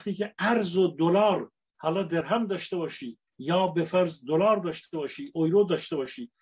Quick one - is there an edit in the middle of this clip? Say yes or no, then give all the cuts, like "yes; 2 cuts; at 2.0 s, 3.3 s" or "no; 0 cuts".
yes; 1 cut; at 3.3 s